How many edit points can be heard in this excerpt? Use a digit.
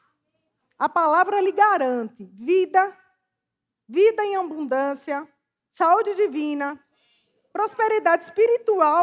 0